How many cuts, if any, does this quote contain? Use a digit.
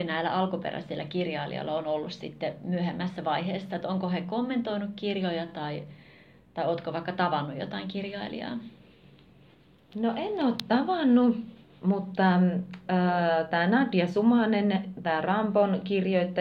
0